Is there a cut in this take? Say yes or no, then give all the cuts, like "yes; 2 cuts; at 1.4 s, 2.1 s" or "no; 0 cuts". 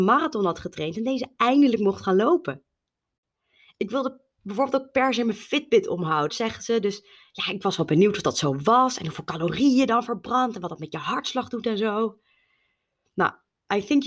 yes; 1 cut; at 6.3 s